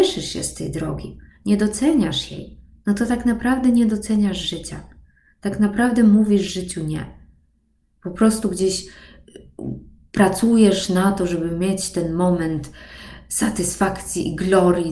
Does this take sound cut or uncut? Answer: uncut